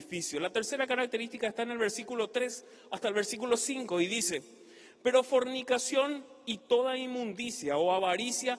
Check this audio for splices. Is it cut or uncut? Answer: uncut